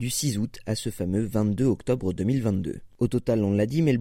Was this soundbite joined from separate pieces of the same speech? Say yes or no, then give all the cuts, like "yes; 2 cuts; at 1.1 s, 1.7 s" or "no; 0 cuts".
no; 0 cuts